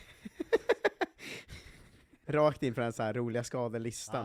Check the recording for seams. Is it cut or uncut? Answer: cut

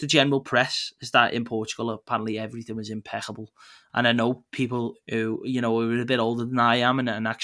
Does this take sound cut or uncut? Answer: cut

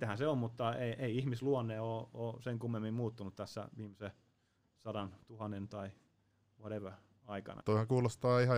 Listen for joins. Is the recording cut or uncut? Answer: cut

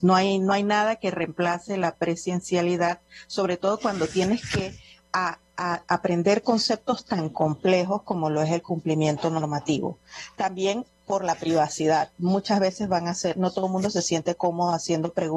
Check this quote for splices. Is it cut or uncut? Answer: uncut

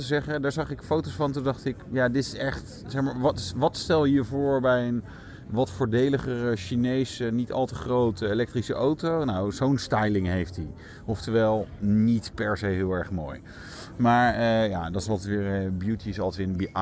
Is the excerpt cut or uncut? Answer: uncut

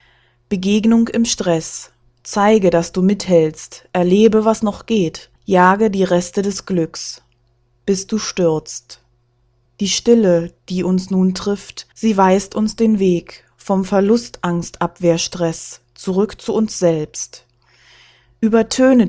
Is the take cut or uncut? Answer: cut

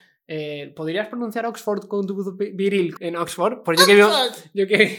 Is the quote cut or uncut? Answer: cut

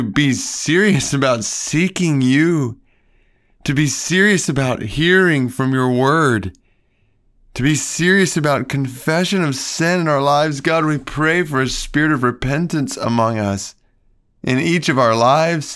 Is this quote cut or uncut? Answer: uncut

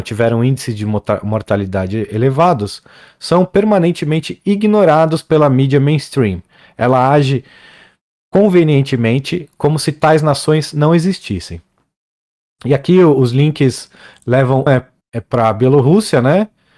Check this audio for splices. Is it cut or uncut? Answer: cut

